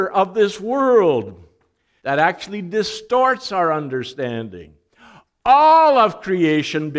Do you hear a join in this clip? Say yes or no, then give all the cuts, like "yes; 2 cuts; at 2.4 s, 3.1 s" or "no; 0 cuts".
yes; 1 cut; at 2.0 s